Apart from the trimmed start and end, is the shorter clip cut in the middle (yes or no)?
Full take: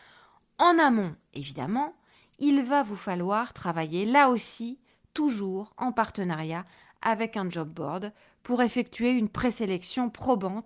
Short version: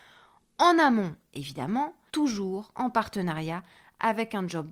yes